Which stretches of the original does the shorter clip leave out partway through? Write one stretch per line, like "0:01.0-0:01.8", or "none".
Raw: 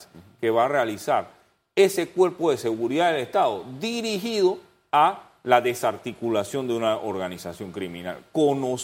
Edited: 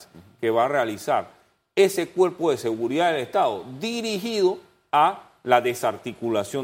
none